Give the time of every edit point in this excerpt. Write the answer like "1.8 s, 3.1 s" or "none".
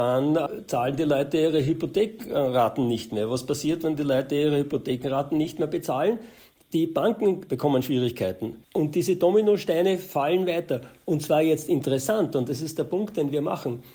8.6 s